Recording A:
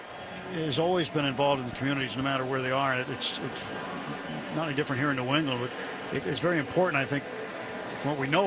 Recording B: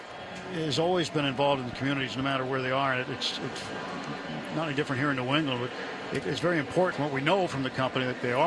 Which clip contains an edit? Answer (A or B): B